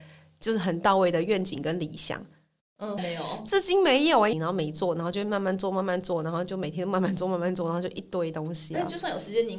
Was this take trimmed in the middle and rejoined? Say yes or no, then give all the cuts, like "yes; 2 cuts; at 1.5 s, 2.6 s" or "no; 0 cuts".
yes; 2 cuts; at 3.0 s, 4.3 s